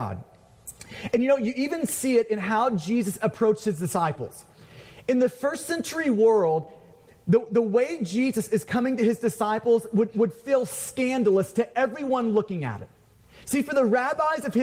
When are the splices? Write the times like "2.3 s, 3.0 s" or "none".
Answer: none